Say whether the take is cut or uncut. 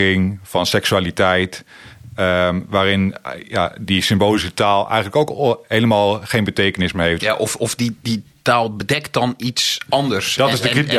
cut